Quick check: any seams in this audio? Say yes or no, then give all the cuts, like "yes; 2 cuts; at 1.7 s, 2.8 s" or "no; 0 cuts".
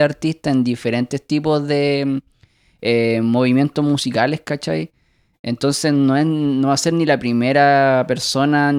no; 0 cuts